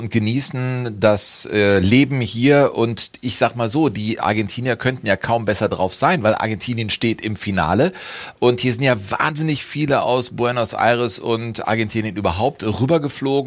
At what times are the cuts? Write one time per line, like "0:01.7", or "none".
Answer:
none